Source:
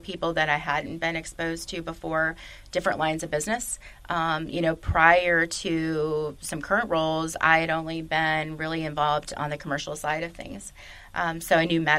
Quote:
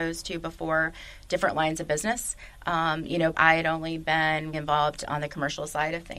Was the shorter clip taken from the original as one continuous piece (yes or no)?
no